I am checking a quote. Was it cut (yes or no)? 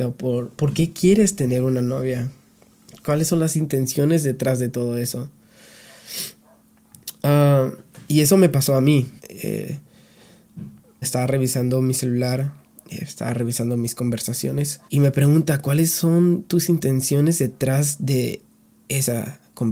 yes